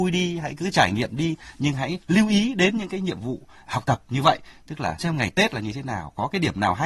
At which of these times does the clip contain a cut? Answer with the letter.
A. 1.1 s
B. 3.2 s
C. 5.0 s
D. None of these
C